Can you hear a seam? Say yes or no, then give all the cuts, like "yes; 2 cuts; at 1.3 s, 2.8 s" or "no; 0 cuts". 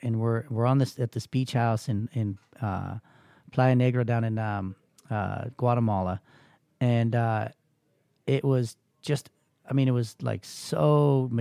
no; 0 cuts